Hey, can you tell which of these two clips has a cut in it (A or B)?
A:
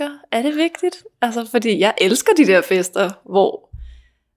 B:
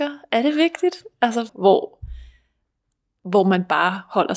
B